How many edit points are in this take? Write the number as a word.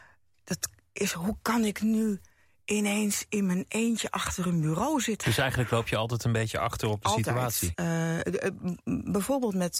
two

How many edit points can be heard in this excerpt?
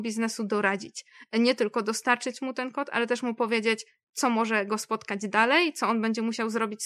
zero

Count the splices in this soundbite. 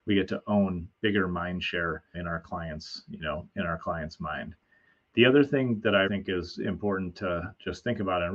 two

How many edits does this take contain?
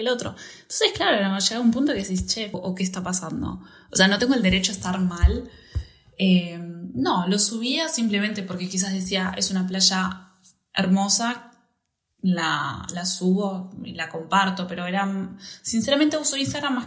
one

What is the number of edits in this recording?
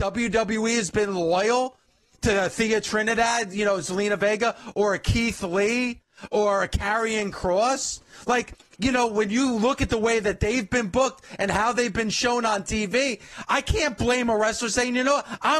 zero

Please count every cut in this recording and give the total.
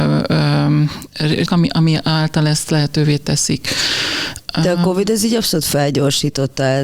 one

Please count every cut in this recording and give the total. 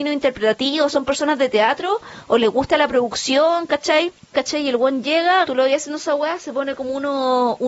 two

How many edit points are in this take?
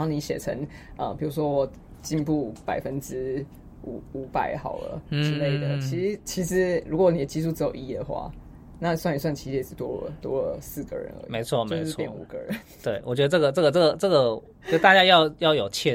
zero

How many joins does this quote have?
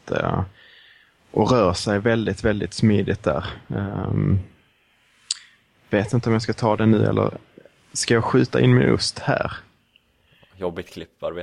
zero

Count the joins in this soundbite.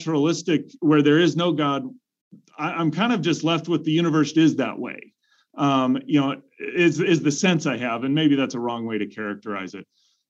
one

